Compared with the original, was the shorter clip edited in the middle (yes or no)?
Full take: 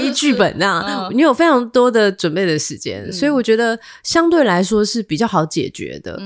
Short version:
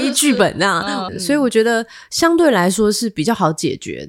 yes